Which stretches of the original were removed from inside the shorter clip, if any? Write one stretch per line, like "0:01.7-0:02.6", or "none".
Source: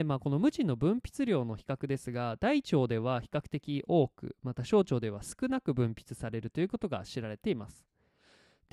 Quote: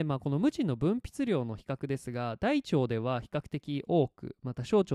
none

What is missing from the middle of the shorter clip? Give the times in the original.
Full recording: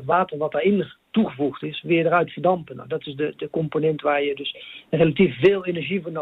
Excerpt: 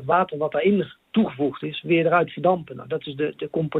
none

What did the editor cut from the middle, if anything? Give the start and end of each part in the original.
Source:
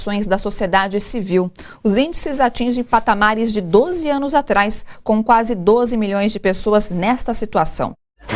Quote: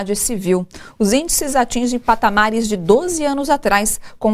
none

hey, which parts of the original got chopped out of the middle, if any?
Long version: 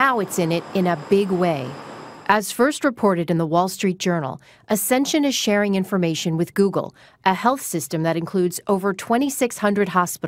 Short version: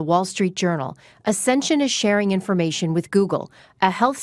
none

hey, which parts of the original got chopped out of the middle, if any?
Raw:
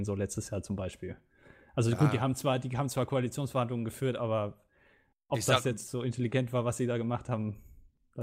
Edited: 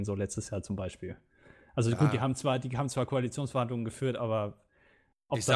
none

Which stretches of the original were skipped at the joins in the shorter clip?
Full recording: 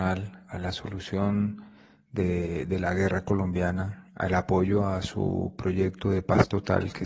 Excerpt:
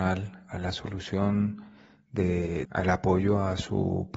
0:02.7-0:04.1

